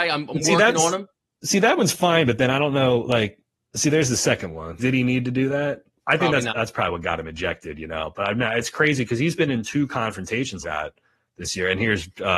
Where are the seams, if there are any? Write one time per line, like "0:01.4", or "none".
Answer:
0:04.8
0:06.5
0:10.6